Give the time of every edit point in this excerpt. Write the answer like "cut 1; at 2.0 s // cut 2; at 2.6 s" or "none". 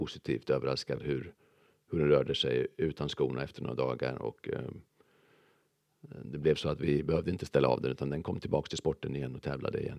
none

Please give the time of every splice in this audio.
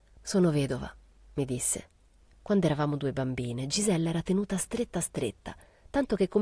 cut 1; at 2.2 s

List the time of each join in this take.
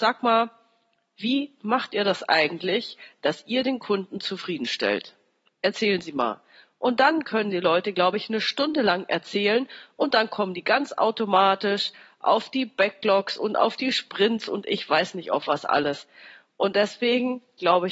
none

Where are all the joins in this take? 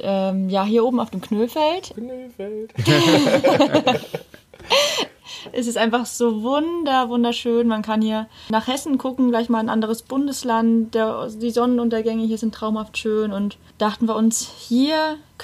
none

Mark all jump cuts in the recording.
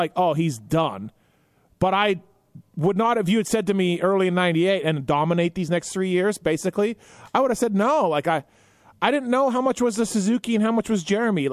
cut 1; at 4.8 s

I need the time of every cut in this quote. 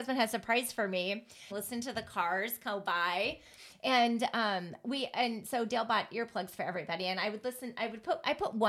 cut 1; at 1.5 s

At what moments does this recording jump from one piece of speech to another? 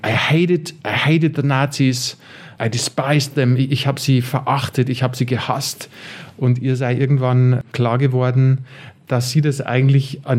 none

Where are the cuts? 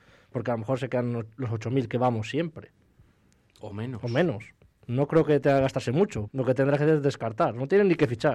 cut 1; at 4.8 s // cut 2; at 6.3 s

